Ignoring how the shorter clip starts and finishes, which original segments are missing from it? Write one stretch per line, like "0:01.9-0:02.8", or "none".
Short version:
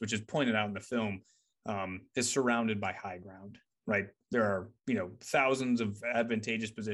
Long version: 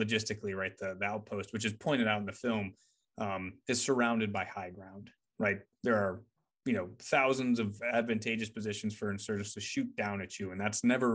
0:06.3-0:06.6